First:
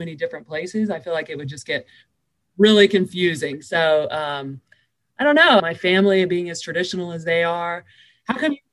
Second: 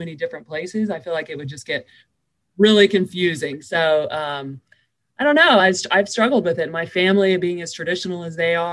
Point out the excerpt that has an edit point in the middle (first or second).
first